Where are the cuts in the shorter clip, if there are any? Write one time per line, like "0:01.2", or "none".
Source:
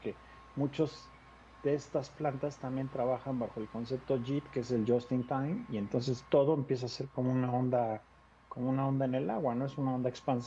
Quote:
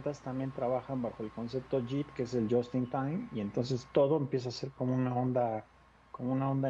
none